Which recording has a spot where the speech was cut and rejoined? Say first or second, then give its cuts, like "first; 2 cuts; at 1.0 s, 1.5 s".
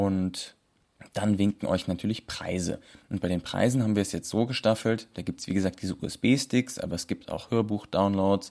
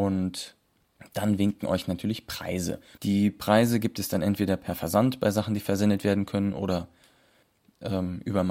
second; 1 cut; at 3.0 s